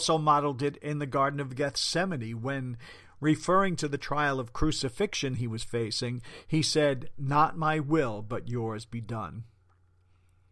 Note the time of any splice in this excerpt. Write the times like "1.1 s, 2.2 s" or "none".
none